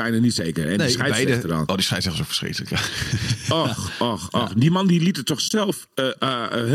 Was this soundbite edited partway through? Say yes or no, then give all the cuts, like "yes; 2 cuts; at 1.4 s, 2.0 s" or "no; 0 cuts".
no; 0 cuts